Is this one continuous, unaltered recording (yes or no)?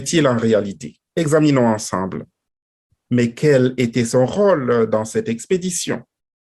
no